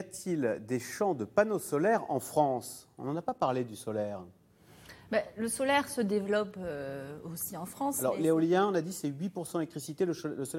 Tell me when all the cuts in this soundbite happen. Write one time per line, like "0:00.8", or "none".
none